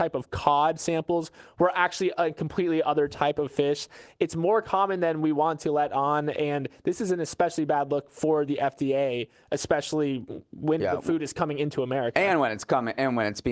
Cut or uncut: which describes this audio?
cut